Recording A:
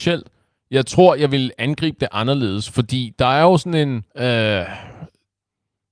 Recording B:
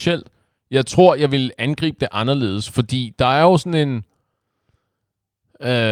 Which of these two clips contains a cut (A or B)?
A